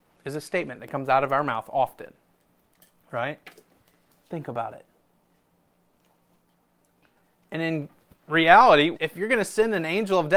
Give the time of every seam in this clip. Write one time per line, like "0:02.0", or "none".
0:04.2
0:08.9

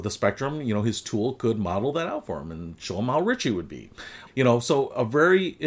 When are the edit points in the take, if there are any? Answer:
0:04.3

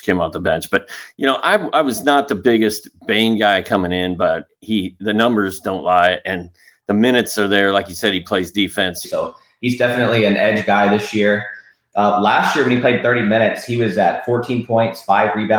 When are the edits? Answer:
0:09.0

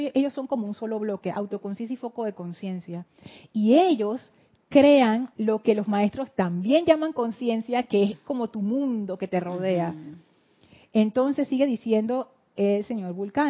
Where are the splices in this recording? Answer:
none

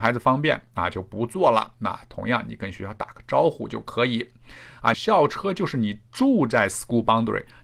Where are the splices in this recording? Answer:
0:04.9

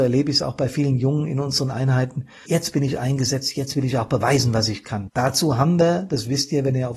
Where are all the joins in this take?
0:02.5
0:05.1

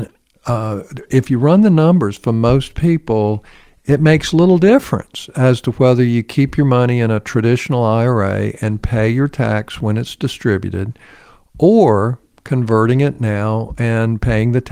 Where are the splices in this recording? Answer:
none

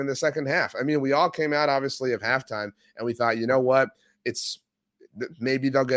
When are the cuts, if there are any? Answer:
none

